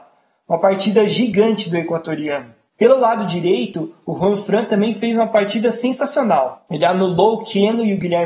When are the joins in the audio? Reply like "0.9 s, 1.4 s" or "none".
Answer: 2.7 s